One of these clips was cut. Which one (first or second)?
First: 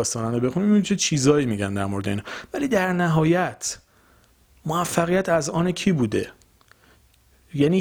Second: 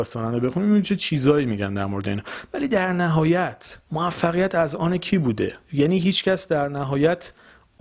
second